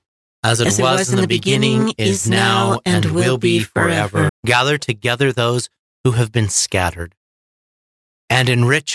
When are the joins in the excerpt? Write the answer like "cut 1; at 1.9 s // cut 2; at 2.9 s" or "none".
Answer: cut 1; at 4.3 s